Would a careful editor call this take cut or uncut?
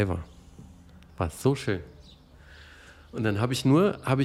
uncut